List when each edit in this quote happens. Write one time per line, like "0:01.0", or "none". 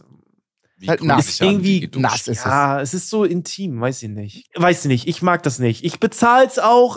0:04.5